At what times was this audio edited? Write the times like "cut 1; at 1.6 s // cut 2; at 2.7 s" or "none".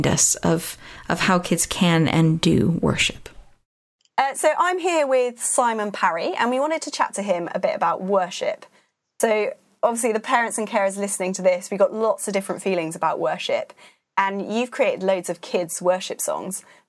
none